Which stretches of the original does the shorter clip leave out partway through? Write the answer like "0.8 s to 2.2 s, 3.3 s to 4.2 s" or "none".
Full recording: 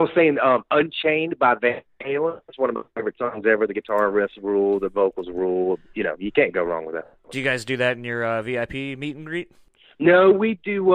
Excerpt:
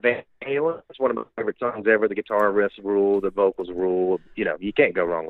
none